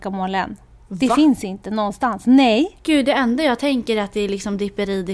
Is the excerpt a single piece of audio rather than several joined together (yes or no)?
yes